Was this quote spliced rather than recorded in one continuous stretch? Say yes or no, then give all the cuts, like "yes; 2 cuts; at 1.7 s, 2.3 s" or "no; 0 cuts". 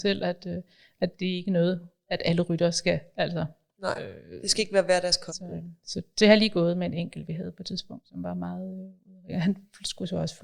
yes; 1 cut; at 5.3 s